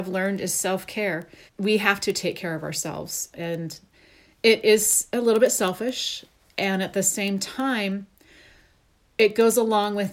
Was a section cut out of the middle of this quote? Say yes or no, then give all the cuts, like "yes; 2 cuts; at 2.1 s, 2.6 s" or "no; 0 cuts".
yes; 2 cuts; at 1.5 s, 3.3 s